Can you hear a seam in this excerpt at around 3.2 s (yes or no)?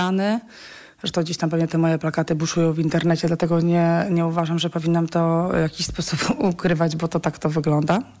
no